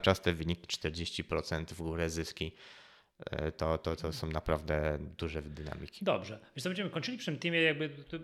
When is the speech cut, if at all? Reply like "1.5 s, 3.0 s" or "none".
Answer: none